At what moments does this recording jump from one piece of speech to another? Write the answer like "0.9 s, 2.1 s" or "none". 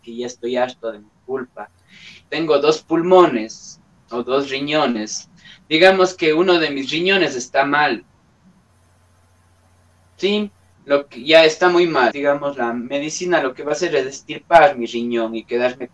2.3 s, 12.1 s